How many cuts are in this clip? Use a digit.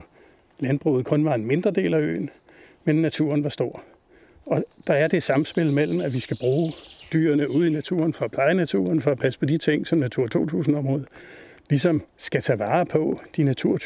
1